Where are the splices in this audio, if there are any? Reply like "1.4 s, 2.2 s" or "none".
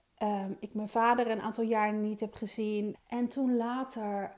2.9 s